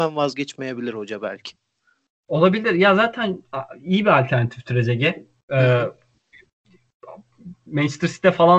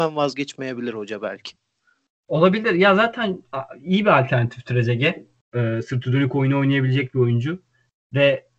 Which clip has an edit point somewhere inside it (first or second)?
second